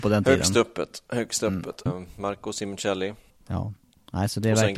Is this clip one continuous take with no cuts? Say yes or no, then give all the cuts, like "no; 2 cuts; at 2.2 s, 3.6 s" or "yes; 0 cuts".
no; 2 cuts; at 1.9 s, 3.3 s